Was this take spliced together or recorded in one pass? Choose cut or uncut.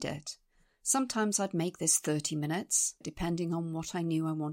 cut